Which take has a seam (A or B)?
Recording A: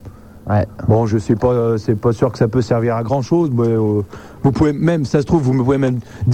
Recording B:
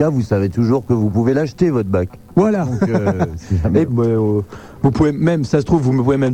B